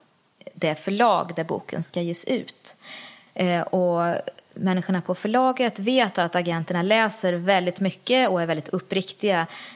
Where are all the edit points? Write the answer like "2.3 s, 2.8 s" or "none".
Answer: 3.3 s